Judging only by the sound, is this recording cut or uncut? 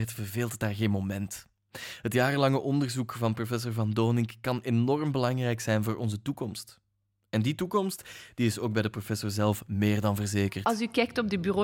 uncut